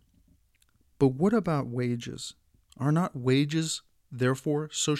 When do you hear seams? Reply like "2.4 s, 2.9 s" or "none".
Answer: none

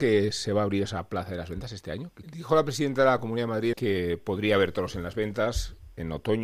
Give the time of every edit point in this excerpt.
2.2 s, 3.7 s

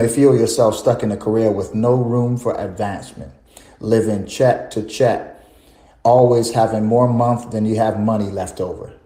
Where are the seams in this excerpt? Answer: none

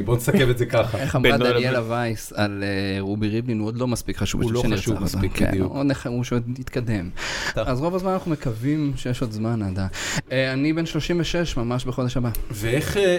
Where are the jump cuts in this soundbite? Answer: 7.5 s

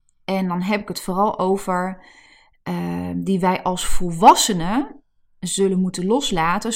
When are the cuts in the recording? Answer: none

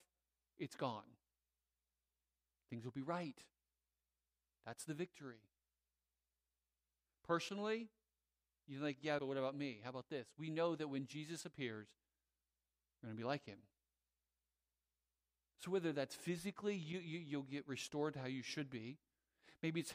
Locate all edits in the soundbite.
9.2 s

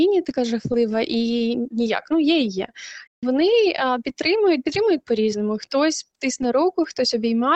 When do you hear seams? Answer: 3.1 s

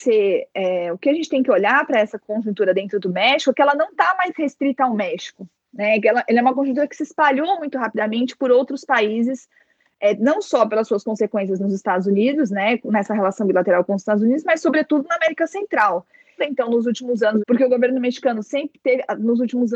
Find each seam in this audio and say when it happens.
16.4 s, 17.4 s

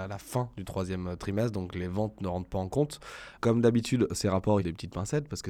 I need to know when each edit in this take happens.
3.4 s, 4.6 s

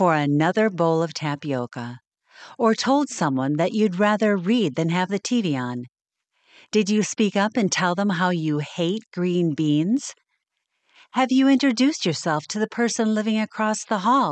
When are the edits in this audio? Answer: none

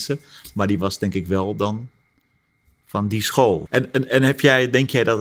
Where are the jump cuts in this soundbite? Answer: 3.7 s

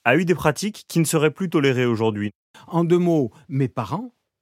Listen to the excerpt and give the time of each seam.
2.5 s

